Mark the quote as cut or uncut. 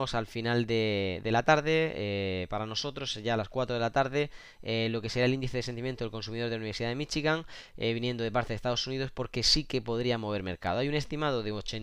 uncut